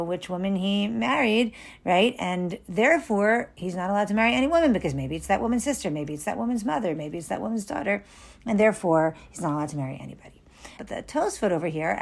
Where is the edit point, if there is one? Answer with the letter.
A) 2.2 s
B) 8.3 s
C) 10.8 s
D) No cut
C